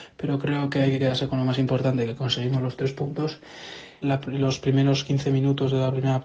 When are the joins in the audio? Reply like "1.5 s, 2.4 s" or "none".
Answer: 4.0 s